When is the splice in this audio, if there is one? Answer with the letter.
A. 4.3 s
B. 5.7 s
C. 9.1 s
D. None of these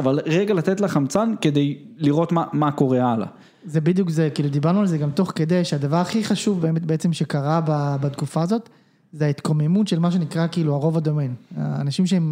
D